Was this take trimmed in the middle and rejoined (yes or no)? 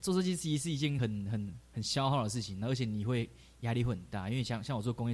no